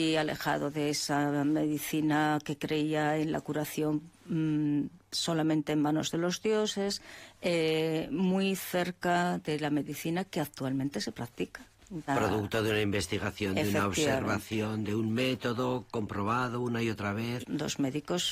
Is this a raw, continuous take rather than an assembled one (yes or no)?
no